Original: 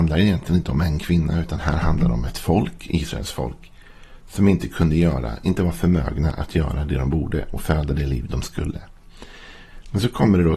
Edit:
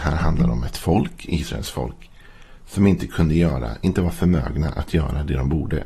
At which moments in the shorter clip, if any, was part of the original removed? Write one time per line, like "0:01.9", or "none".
none